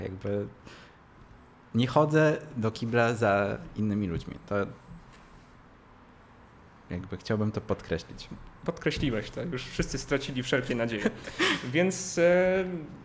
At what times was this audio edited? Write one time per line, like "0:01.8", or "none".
none

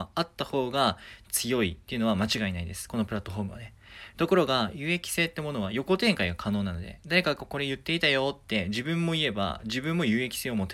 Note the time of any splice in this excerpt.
none

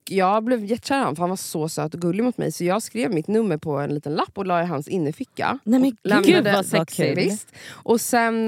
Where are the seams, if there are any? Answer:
none

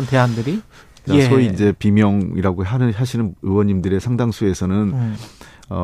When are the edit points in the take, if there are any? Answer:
0:01.1

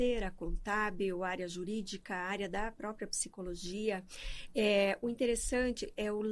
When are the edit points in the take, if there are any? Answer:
none

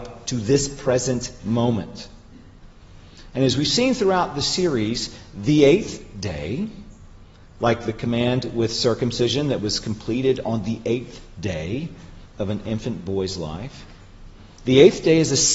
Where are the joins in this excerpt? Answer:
none

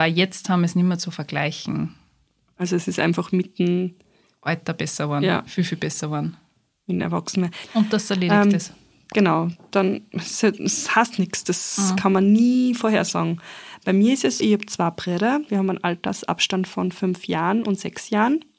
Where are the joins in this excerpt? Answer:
0:07.6
0:14.4
0:15.5

